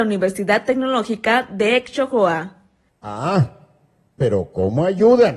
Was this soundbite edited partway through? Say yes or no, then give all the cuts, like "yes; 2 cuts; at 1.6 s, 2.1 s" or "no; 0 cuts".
yes; 1 cut; at 2.9 s